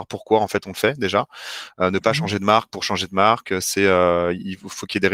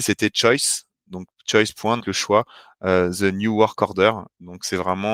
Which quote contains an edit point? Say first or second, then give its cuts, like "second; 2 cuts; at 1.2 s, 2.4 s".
second; 1 cut; at 2.0 s